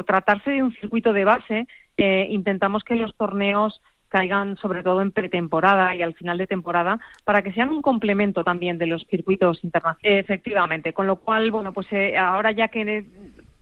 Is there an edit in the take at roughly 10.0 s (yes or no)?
yes